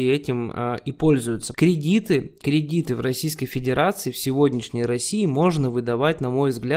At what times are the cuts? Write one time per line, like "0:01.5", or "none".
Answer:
0:01.5